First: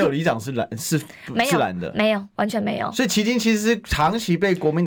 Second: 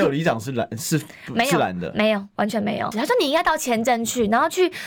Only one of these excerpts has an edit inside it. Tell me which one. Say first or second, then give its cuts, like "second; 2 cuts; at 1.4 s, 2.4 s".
second; 1 cut; at 2.9 s